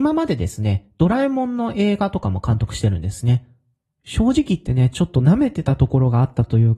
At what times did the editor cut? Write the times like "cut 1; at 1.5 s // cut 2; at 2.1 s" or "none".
cut 1; at 3.9 s